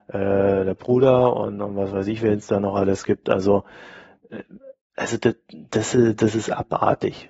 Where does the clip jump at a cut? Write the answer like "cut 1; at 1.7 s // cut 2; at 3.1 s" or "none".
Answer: none